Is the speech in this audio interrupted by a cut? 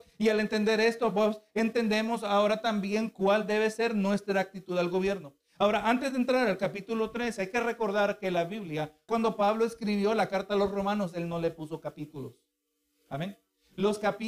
yes; 1 cut; at 9.1 s

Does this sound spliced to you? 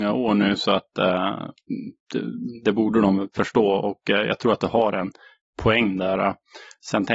no; 0 cuts

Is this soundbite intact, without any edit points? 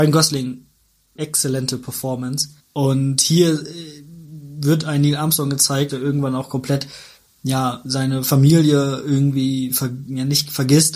no; 3 cuts; at 1.2 s, 2.6 s, 5.9 s

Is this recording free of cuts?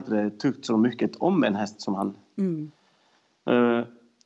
yes; 0 cuts

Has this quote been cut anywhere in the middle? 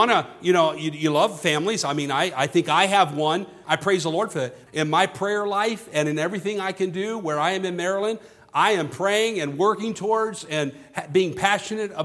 yes; 2 cuts; at 3.6 s, 4.7 s

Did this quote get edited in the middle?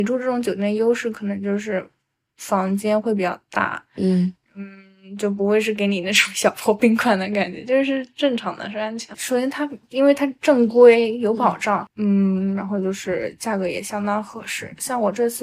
yes; 2 cuts; at 9.1 s, 11.9 s

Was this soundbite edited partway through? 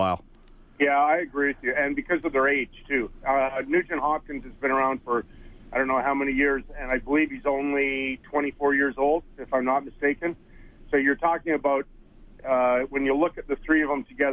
no; 0 cuts

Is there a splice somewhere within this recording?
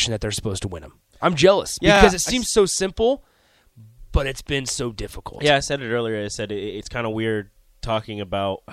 no; 0 cuts

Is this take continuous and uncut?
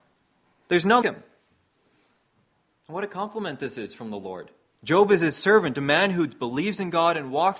no; 2 cuts; at 1.0 s, 4.7 s

